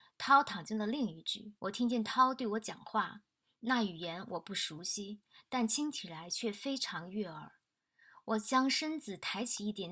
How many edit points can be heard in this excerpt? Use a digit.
1